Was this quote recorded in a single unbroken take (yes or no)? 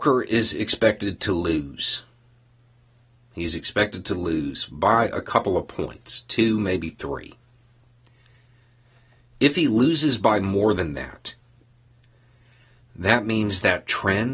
yes